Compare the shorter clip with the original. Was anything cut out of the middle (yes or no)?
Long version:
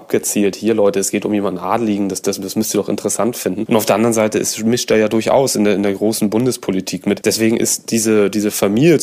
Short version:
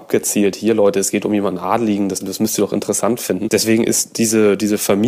yes